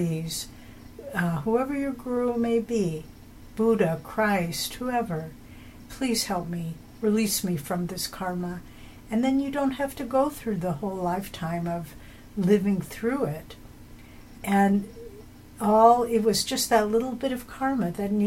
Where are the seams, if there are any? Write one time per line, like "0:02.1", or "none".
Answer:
0:05.9
0:14.3